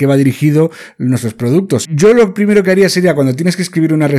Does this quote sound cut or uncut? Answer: cut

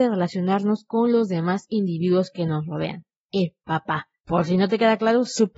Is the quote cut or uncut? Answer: uncut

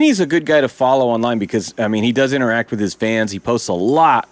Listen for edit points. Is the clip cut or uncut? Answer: uncut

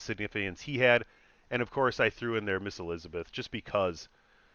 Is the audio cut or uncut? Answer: uncut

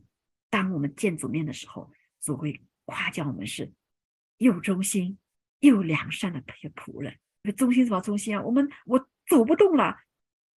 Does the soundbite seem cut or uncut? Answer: cut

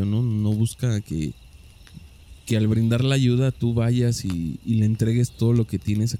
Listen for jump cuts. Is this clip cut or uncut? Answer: uncut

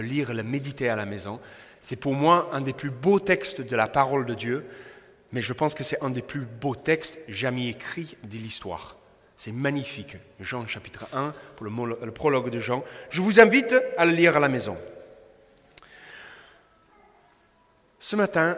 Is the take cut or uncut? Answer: uncut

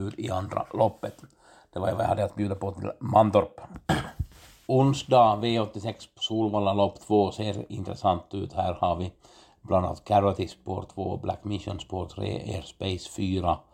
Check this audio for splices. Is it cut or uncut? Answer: uncut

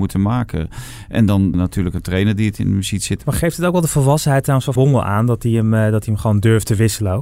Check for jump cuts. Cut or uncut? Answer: cut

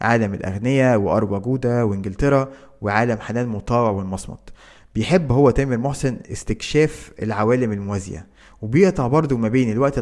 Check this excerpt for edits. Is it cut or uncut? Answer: uncut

